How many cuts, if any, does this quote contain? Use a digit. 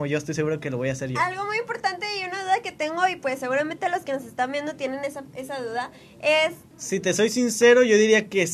1